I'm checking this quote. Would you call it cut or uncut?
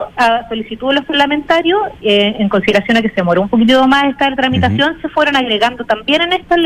uncut